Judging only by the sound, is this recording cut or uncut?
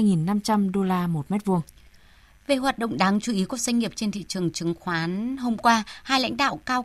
uncut